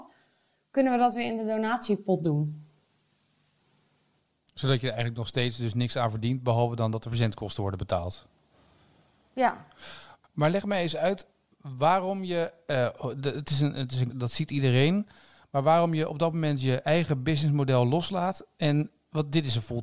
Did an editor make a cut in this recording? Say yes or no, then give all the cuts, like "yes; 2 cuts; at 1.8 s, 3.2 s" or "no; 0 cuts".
yes; 1 cut; at 14.1 s